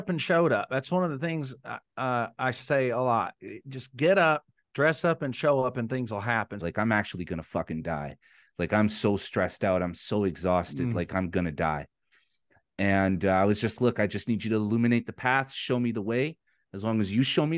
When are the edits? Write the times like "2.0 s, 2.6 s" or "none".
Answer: 6.6 s, 13.8 s